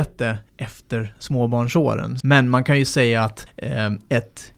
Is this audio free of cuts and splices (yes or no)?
no